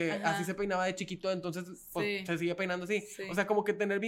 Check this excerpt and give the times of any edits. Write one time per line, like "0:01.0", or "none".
none